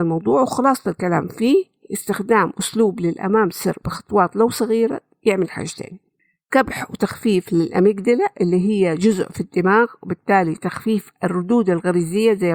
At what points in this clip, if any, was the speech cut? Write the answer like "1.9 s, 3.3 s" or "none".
none